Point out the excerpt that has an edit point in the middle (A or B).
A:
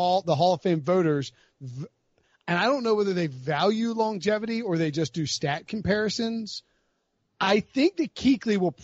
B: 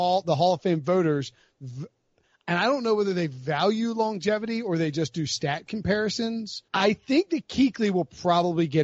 B